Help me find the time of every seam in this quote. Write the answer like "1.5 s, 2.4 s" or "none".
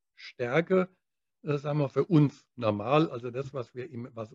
none